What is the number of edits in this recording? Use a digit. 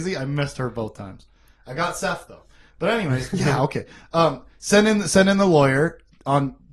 0